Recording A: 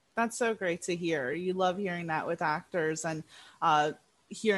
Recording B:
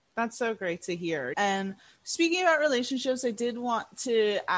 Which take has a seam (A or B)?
B